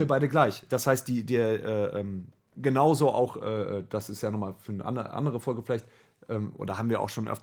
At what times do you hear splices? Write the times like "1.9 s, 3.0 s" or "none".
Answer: none